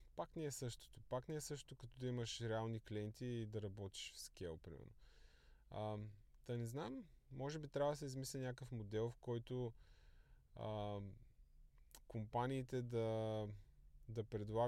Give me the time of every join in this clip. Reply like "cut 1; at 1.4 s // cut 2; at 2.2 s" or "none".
none